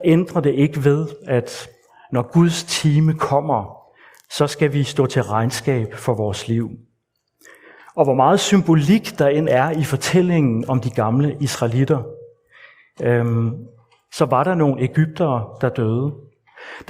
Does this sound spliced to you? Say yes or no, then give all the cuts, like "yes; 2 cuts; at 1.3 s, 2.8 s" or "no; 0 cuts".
no; 0 cuts